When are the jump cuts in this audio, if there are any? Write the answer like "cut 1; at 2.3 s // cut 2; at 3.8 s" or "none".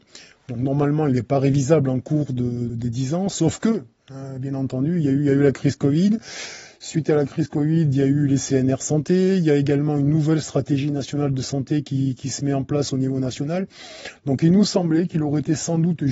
cut 1; at 2.7 s